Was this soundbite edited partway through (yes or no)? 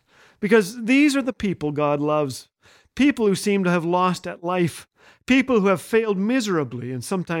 no